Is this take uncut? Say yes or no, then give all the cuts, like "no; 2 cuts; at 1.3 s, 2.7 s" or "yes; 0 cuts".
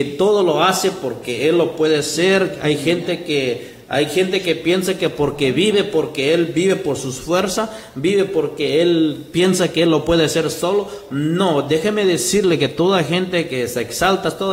yes; 0 cuts